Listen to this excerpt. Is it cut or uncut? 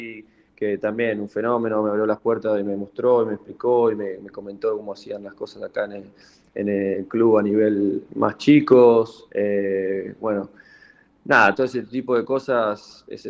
cut